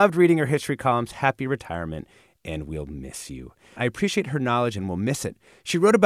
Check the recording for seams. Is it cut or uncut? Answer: cut